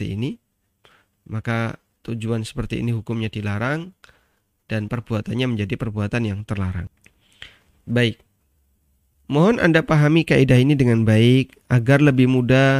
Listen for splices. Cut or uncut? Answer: uncut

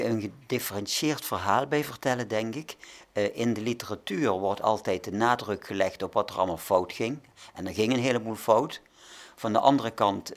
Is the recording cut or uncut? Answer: uncut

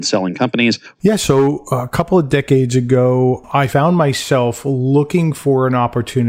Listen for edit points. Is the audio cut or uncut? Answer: cut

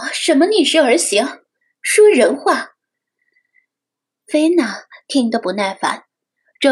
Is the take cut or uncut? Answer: uncut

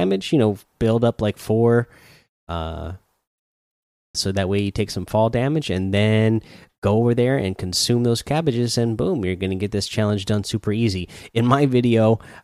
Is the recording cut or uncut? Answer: cut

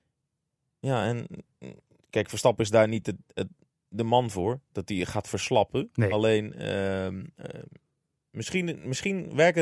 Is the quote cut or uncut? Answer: uncut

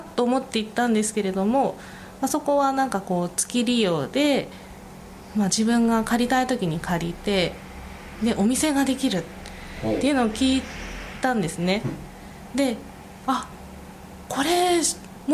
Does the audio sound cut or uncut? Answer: uncut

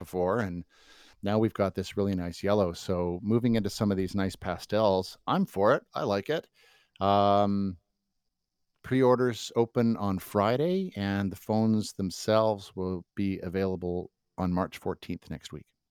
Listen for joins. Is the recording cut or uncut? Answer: uncut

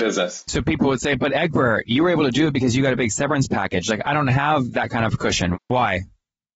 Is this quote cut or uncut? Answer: cut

